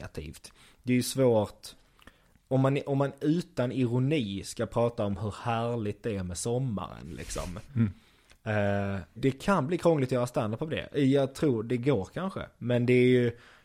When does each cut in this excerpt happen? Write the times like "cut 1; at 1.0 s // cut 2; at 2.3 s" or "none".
cut 1; at 9.2 s

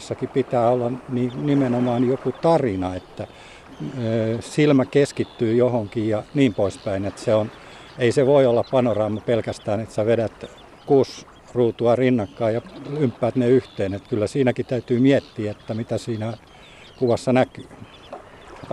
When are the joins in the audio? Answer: none

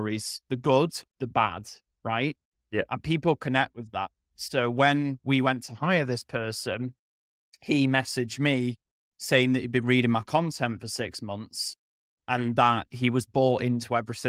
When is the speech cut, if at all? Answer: cut 1; at 1.1 s

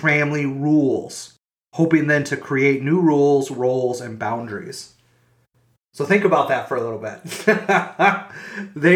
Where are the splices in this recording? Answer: none

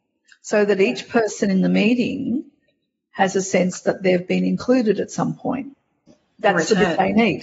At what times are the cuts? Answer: cut 1; at 6.1 s

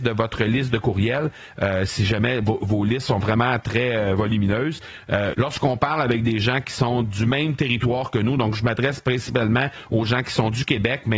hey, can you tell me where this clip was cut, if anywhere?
cut 1; at 5.3 s

